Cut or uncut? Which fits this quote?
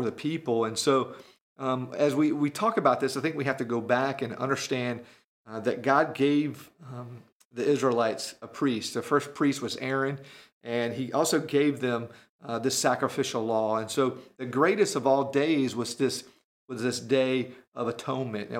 uncut